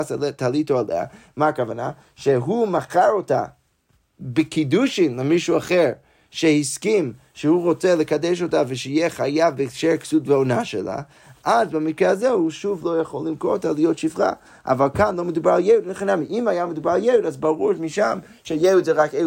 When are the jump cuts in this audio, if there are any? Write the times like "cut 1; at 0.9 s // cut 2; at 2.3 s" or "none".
none